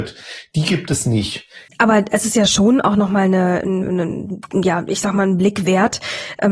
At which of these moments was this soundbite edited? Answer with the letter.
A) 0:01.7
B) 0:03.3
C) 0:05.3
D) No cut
A